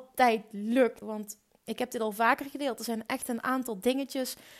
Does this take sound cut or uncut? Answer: cut